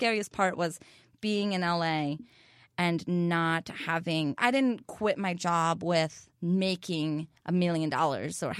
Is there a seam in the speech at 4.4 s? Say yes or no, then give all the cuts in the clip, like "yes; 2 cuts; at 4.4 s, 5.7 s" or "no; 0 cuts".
yes; 2 cuts; at 4.4 s, 6.3 s